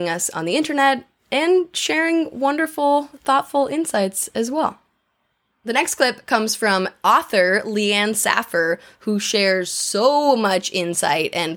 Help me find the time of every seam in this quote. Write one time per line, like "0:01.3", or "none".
none